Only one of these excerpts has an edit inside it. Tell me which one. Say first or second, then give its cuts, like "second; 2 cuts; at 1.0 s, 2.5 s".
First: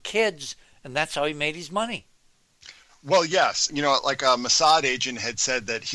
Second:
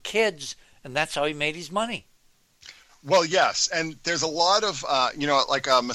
first; 1 cut; at 3.7 s